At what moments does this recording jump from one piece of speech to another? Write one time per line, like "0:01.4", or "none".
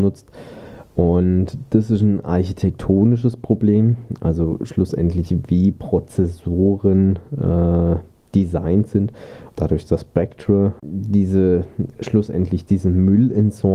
0:09.5